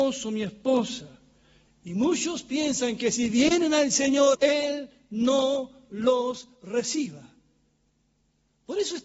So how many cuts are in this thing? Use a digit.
2